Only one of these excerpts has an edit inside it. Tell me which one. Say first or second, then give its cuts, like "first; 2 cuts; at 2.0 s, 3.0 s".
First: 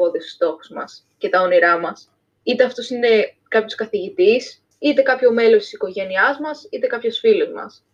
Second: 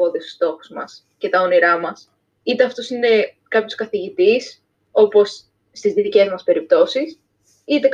first; 1 cut; at 4.7 s